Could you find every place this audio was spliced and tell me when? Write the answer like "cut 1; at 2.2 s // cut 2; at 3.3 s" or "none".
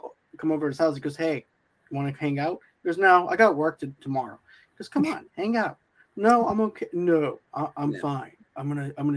none